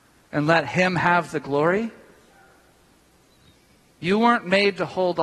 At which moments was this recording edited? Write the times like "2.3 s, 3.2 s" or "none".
none